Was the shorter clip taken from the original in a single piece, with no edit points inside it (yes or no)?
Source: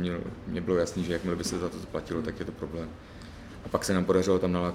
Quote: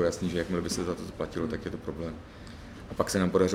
yes